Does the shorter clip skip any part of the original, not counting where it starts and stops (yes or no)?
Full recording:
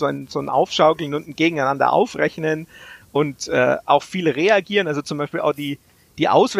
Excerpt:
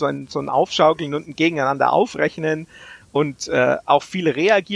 no